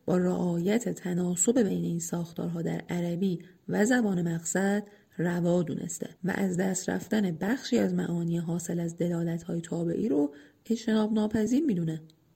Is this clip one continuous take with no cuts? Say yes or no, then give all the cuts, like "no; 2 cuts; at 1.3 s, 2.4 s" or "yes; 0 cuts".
no; 1 cut; at 6.2 s